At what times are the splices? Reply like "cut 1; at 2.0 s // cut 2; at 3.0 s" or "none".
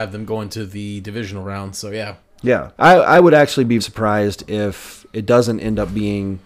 cut 1; at 2.8 s // cut 2; at 3.8 s